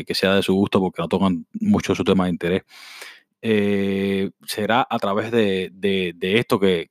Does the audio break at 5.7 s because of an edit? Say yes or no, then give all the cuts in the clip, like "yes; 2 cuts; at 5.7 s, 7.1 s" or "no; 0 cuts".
no; 1 cut; at 3.3 s